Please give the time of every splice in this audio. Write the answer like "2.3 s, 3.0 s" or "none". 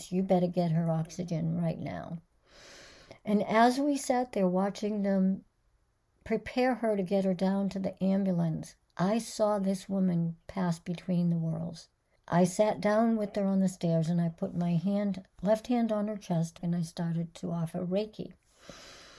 12.2 s, 16.6 s